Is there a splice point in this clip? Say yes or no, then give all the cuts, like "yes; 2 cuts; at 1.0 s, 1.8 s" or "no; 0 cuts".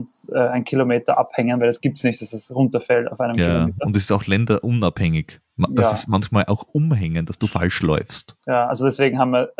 no; 0 cuts